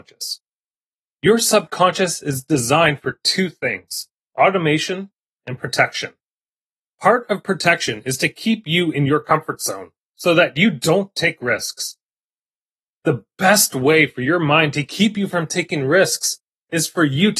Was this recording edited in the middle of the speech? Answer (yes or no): no